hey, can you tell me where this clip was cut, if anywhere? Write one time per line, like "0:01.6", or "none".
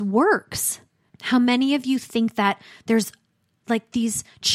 0:01.1